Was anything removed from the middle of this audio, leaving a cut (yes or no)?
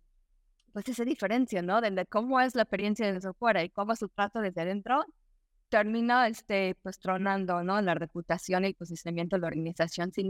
no